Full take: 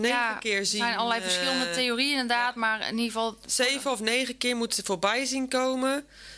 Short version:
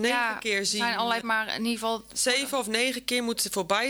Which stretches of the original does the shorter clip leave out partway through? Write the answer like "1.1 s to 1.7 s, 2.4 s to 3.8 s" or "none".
1.2 s to 2.5 s